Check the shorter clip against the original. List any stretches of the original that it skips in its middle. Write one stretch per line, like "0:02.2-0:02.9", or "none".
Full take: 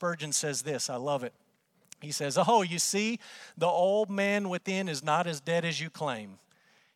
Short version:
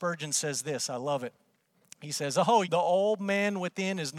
0:02.6-0:03.5